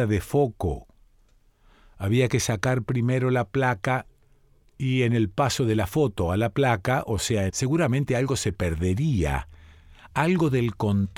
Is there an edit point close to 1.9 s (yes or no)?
no